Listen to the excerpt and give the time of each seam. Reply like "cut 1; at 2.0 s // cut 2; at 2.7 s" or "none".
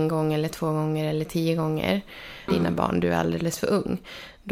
cut 1; at 2.5 s